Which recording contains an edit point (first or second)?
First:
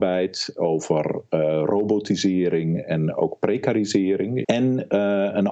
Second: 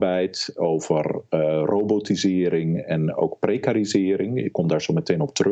first